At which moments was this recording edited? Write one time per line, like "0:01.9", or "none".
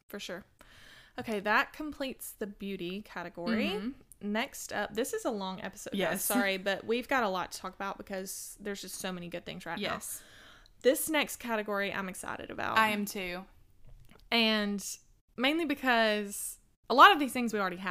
0:05.9